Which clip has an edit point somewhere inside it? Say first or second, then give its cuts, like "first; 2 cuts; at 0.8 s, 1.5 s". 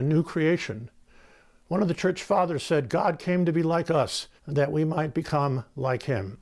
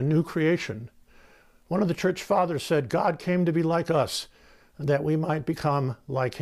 first; 1 cut; at 4.4 s